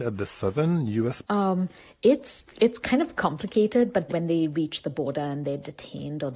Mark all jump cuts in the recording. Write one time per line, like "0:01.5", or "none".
0:01.2
0:04.1